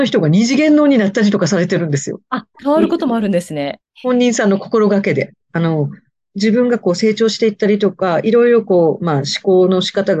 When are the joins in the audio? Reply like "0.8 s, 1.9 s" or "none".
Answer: 2.5 s, 3.8 s, 5.4 s